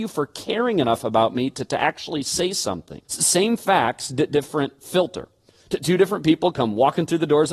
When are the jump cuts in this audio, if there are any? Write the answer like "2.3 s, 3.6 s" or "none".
3.0 s, 5.5 s